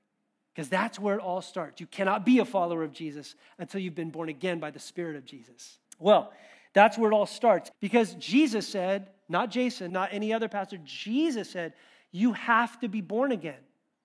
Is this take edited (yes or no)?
yes